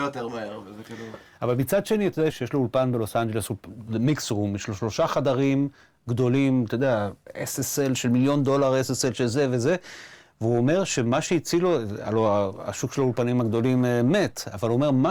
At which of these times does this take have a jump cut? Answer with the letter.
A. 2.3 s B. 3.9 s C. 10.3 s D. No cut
A